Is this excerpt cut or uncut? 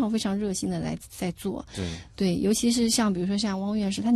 uncut